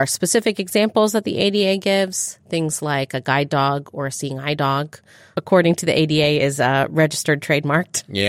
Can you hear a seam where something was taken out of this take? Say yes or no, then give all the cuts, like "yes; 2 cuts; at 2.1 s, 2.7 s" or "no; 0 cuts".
yes; 1 cut; at 5.3 s